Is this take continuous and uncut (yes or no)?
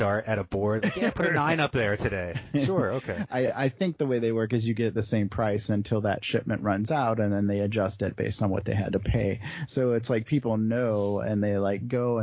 yes